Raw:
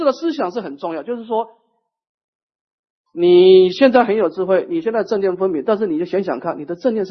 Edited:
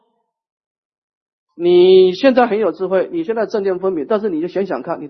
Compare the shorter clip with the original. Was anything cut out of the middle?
no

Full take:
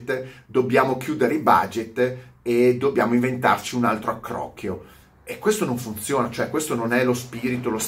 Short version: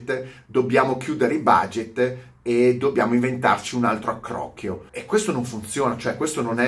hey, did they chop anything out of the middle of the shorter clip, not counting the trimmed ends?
yes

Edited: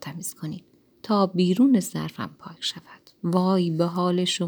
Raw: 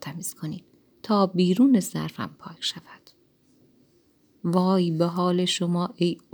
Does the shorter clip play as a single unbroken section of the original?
no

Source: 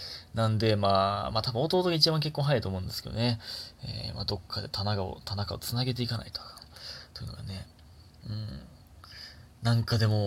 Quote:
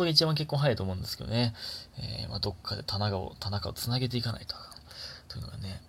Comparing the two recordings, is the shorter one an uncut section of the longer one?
yes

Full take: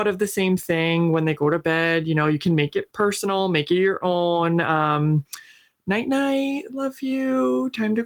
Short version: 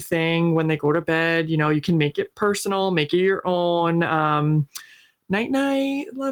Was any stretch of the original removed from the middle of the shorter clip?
no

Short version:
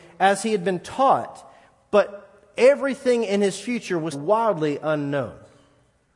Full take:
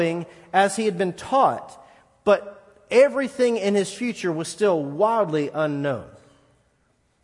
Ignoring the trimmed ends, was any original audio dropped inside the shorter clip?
yes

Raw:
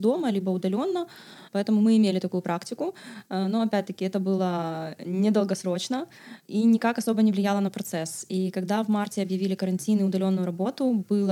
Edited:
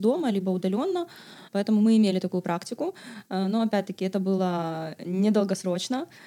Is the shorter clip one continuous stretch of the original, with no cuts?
yes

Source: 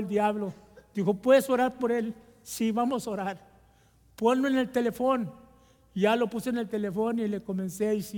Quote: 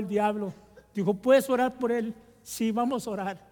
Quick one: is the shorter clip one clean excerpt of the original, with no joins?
yes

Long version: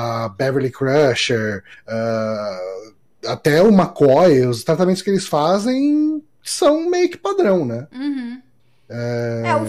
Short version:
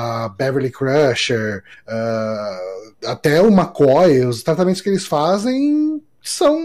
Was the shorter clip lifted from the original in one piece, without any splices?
no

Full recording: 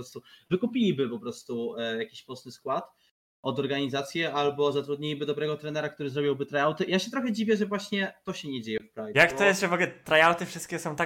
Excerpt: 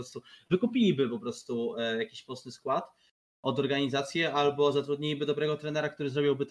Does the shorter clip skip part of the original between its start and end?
no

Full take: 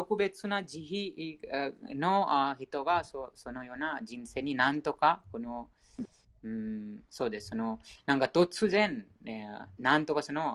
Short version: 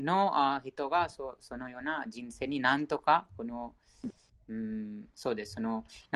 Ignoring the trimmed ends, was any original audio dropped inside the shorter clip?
no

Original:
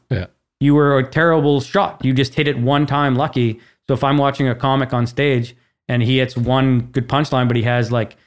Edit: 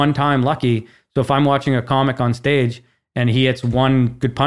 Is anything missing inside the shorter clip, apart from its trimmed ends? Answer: no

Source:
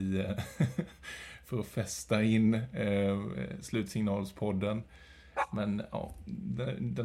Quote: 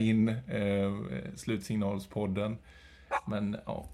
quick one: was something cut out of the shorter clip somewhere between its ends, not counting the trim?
no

